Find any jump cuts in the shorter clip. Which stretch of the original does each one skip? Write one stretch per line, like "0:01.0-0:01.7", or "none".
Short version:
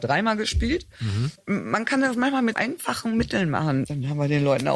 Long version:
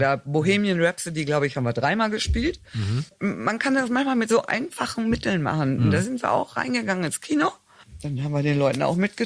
0:04.3-0:04.5
0:05.8-0:08.0